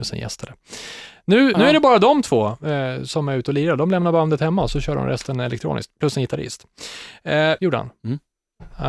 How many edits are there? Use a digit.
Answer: 2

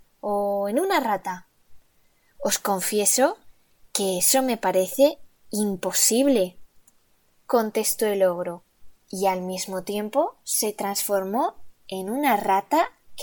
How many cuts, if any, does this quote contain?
1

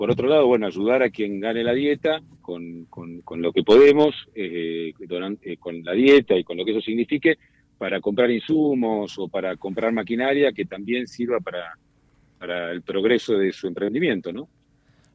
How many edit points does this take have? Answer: 1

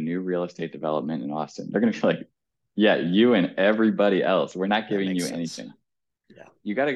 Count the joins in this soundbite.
0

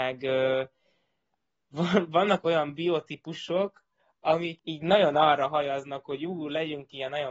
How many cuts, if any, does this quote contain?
1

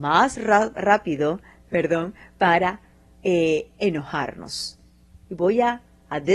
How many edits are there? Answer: 0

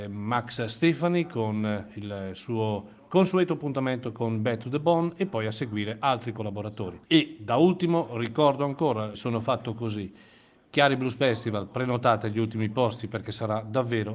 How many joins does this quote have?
2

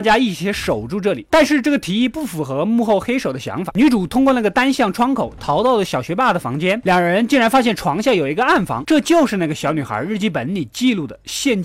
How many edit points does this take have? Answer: 2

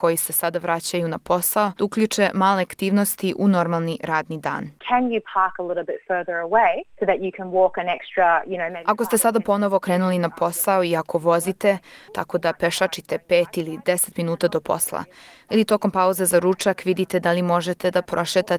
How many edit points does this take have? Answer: 2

